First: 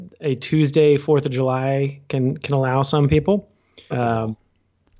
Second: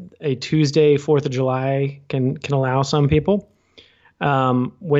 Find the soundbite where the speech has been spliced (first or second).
first